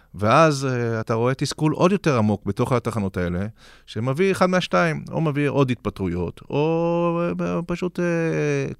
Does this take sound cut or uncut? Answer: uncut